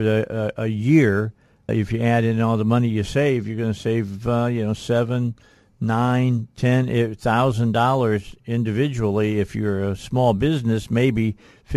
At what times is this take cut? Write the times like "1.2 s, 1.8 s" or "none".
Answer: 1.7 s